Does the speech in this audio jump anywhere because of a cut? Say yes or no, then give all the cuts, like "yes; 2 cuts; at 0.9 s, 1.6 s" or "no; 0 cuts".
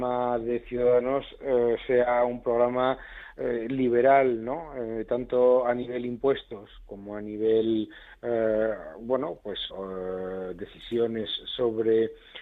yes; 1 cut; at 9.7 s